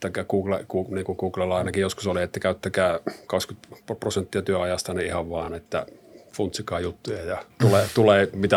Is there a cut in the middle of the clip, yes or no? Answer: no